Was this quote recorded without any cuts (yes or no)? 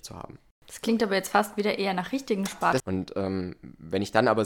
no